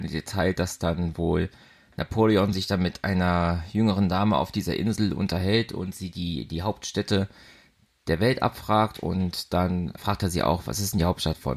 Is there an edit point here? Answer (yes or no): yes